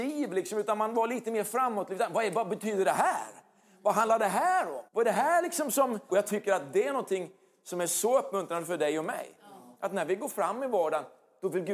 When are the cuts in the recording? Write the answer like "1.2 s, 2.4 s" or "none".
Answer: 4.9 s, 6.1 s

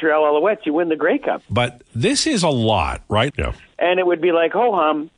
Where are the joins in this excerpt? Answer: 1.5 s, 3.3 s

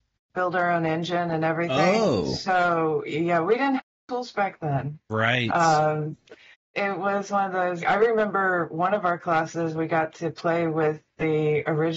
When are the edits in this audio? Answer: 6.7 s, 7.8 s

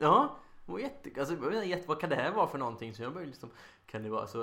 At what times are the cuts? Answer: none

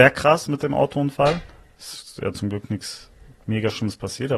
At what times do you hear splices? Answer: none

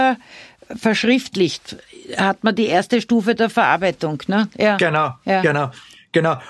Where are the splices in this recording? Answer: none

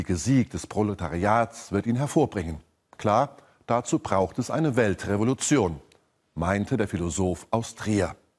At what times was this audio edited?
none

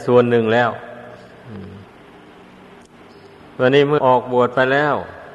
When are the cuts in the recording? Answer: 4.0 s

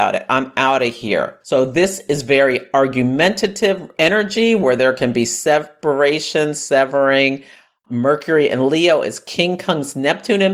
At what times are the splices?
1.4 s

